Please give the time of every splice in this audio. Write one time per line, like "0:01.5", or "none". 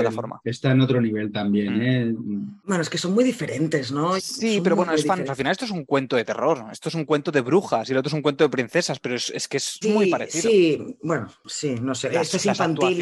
0:04.2
0:05.3
0:09.8